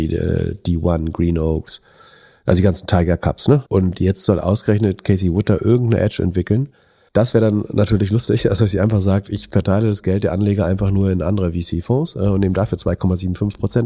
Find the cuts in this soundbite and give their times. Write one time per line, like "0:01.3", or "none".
0:03.7
0:07.1